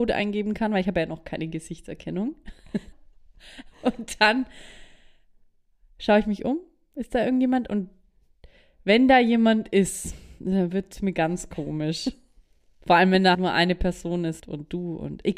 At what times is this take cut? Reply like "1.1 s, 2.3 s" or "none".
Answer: 2.9 s, 13.3 s, 14.4 s

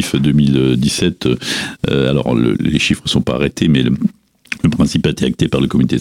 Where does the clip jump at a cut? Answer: none

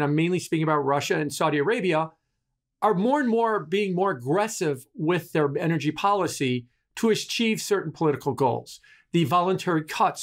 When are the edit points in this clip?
none

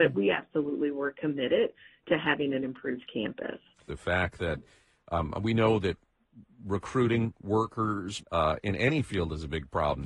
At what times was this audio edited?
3.9 s, 8.2 s

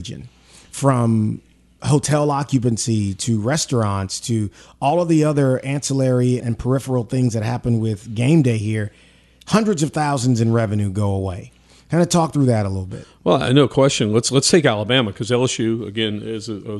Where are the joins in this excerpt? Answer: 6.4 s

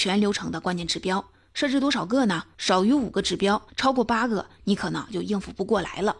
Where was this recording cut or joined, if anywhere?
2.5 s, 3.7 s

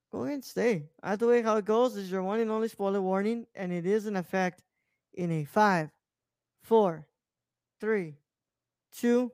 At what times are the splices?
none

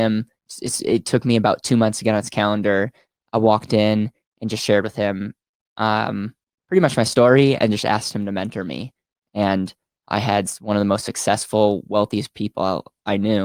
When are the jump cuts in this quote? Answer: none

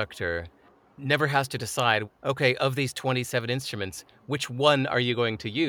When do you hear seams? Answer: 2.0 s

